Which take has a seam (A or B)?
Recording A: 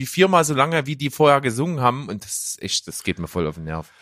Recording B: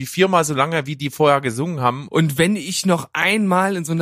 B